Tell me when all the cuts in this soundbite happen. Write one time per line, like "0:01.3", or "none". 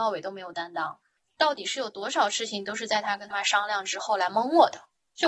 0:03.3